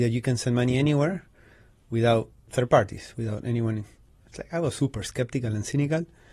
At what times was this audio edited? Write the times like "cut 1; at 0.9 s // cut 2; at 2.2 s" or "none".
none